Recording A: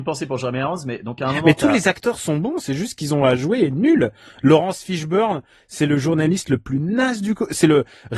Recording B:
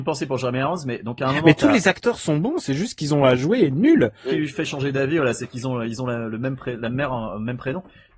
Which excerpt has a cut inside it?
B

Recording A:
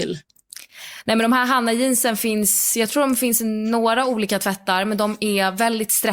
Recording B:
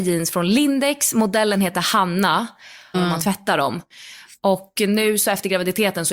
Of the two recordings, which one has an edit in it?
B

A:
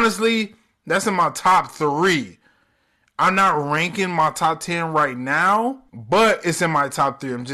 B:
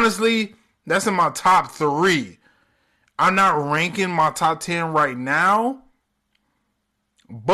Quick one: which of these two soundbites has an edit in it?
A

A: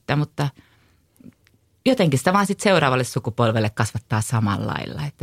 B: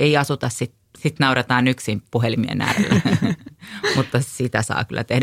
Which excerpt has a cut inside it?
B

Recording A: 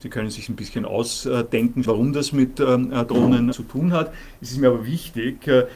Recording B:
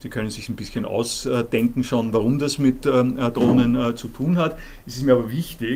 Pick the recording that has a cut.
A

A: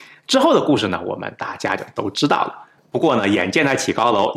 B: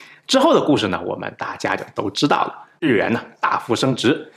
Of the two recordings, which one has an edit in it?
A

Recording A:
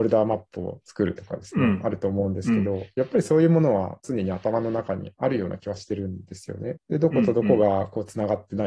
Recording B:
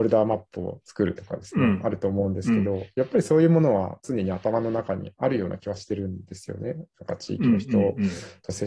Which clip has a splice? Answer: A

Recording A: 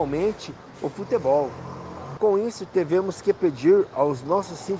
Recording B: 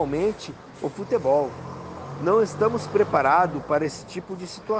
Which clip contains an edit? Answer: A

